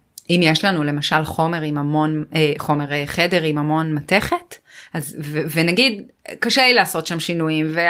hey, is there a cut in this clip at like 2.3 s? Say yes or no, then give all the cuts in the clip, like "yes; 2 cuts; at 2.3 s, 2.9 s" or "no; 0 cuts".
no; 0 cuts